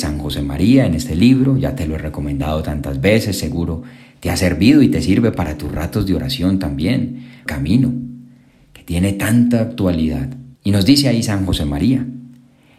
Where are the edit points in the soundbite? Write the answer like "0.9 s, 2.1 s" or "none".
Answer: 7.5 s, 10.6 s